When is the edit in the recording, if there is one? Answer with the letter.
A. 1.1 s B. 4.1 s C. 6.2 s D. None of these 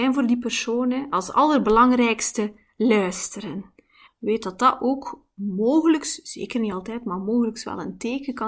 B